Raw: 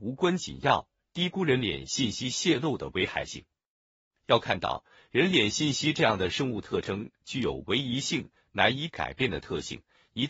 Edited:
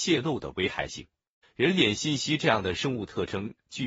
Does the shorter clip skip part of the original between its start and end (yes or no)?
yes